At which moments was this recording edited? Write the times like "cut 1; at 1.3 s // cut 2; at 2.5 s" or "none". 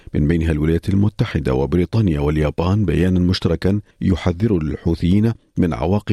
cut 1; at 3.9 s